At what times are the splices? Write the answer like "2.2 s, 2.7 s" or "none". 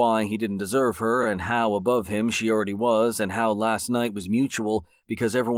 none